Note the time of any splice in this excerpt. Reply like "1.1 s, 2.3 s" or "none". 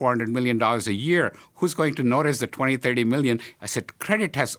3.6 s